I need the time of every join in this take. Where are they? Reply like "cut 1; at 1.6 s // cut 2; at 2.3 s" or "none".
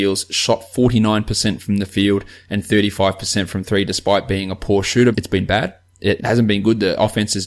cut 1; at 5.1 s // cut 2; at 6.2 s